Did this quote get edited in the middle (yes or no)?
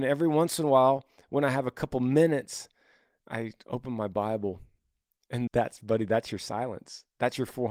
yes